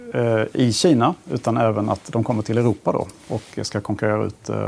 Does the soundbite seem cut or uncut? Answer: uncut